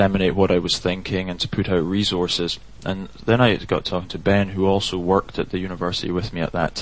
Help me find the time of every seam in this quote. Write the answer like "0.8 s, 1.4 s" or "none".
2.8 s